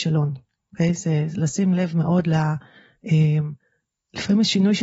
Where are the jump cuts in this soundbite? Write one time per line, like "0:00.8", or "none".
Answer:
none